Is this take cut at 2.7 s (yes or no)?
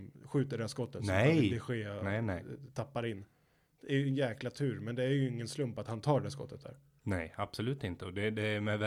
no